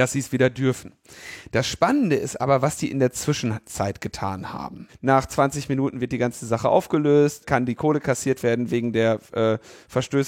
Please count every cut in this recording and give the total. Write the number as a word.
two